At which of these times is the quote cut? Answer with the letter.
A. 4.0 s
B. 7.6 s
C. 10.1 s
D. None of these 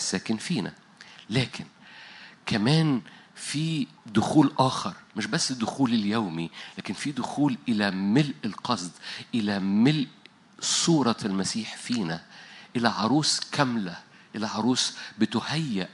A